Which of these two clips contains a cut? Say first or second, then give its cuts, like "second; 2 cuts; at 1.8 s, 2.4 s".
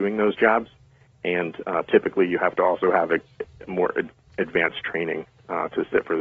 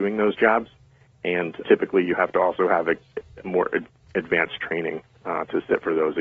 second; 1 cut; at 1.6 s